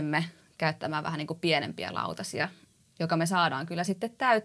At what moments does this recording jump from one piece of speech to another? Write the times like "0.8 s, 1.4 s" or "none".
none